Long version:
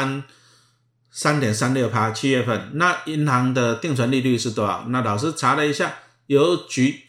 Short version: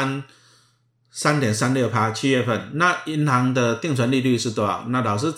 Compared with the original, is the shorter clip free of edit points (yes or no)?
yes